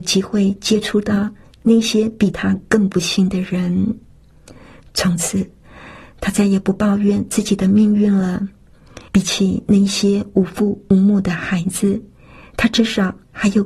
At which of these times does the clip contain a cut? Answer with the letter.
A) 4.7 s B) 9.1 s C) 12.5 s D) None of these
B